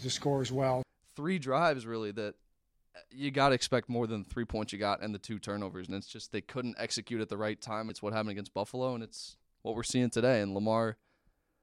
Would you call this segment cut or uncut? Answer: cut